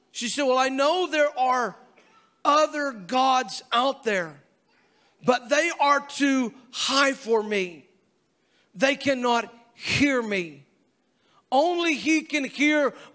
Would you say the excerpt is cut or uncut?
uncut